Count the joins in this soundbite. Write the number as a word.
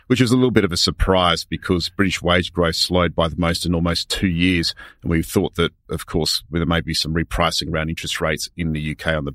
zero